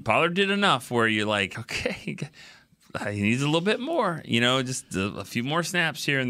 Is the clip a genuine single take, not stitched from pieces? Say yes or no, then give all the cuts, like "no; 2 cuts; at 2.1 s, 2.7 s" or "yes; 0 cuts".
yes; 0 cuts